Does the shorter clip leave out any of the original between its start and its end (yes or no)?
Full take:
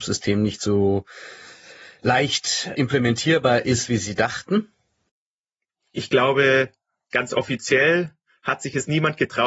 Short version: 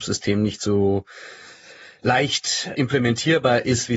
no